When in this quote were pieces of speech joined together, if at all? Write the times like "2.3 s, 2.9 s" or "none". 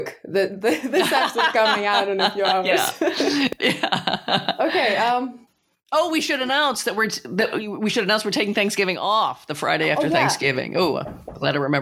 3.6 s